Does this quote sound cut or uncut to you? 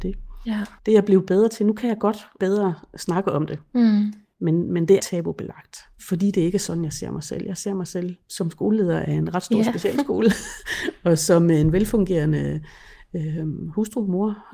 cut